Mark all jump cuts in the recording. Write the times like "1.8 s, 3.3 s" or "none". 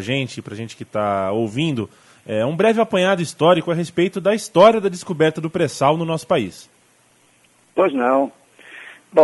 none